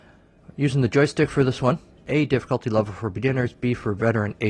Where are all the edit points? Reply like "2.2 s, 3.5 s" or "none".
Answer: 2.0 s